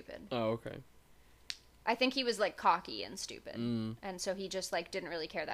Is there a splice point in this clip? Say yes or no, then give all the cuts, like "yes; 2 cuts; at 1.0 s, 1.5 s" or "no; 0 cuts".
no; 0 cuts